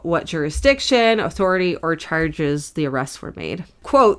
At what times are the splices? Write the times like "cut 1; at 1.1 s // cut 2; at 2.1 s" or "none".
none